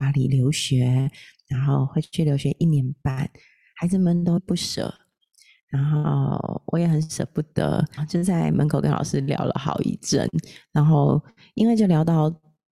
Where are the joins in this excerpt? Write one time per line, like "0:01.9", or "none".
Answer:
0:04.4
0:08.0